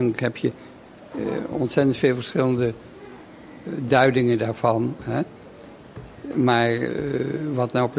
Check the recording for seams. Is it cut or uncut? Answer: uncut